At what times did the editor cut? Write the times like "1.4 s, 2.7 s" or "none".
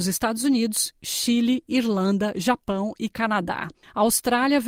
none